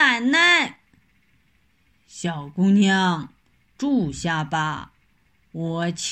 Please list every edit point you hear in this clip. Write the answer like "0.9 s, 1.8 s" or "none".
1.3 s

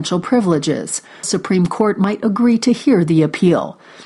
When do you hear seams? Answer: 1.2 s

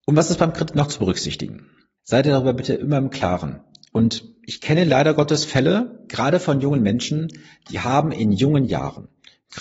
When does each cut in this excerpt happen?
2.0 s

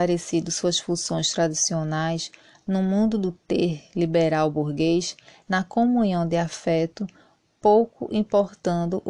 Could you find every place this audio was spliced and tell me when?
5.4 s

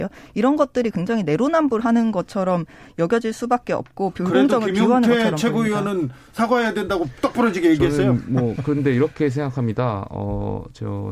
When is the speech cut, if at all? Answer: none

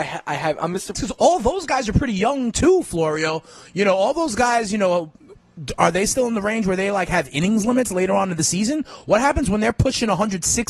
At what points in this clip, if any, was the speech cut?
0.9 s

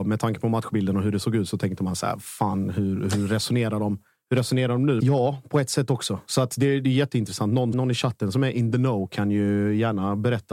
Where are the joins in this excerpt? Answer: 5.0 s, 7.7 s

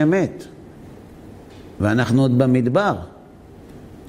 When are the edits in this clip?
none

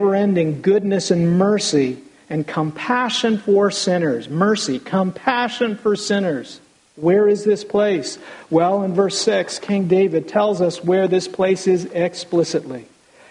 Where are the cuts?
6.8 s

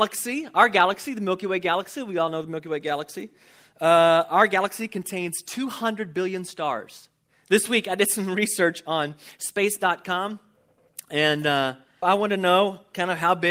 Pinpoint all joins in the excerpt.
7.3 s, 12.0 s

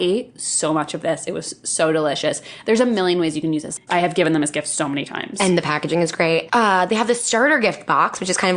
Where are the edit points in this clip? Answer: 3.9 s, 6.5 s

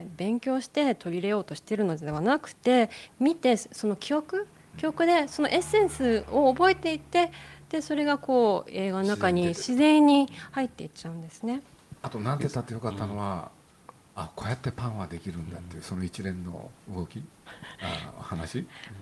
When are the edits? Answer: none

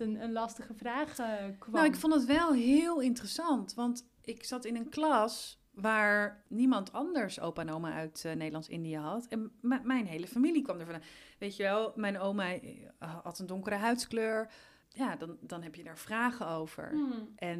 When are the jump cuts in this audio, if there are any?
none

